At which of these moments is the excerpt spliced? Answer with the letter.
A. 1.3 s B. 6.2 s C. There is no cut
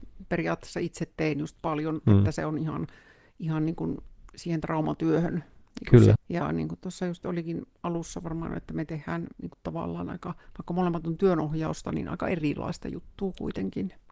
B